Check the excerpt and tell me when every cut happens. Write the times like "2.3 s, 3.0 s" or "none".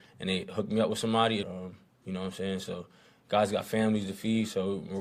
1.4 s